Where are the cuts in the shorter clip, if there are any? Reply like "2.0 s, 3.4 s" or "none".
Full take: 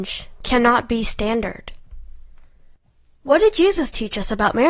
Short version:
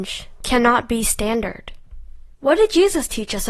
2.3 s

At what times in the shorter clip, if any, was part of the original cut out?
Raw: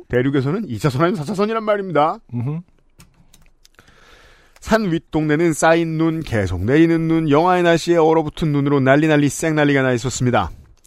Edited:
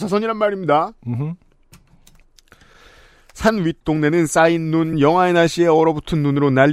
4.9 s

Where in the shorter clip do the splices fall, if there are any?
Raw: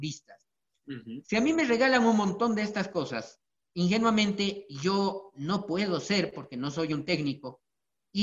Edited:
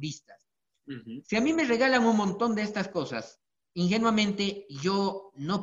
none

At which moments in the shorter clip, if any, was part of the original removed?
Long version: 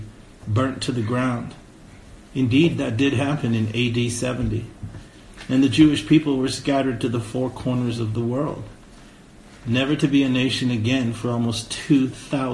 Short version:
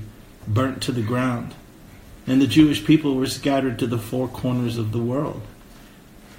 2.2 s

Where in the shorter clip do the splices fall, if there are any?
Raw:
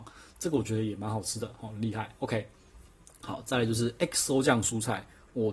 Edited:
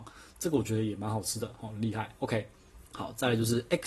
2.9 s

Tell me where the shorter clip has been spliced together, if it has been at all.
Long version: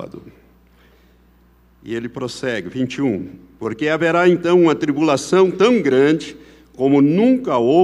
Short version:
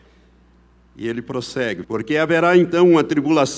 1.8 s

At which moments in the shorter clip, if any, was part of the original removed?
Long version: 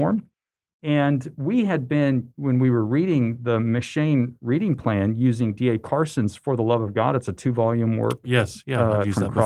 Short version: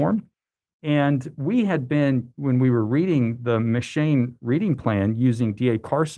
none

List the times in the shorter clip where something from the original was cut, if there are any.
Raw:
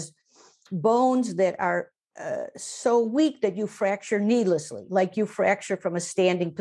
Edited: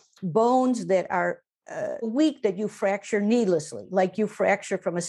2.0 s

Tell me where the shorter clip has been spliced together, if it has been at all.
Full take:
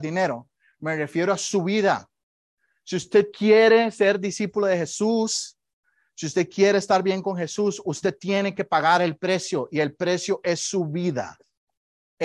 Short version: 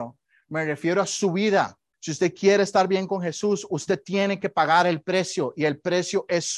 1.9 s

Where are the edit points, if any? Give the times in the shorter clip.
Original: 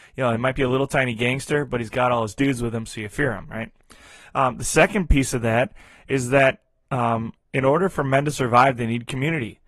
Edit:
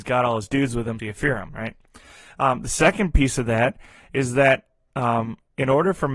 1.0 s

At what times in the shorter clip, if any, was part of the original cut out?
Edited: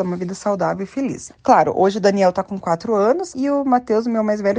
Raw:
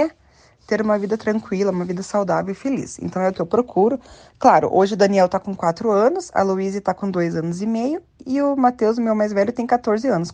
1.3 s, 3.3 s

